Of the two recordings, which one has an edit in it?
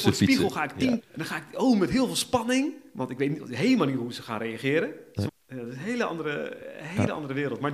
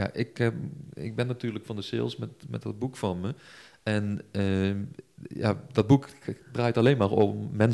first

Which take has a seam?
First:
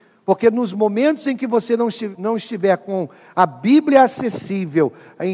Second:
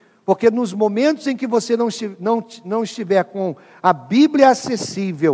first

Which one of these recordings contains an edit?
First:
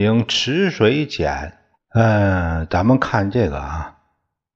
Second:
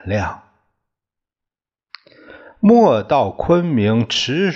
first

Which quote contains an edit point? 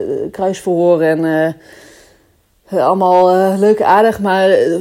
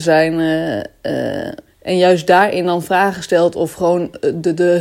second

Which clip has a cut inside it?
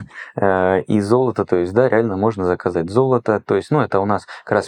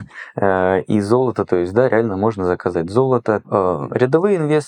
second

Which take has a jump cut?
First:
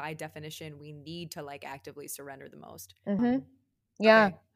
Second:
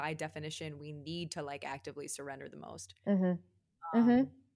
first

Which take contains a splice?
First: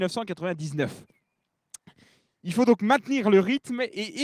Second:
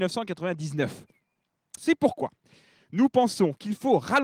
second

